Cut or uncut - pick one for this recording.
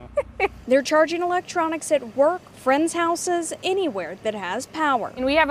cut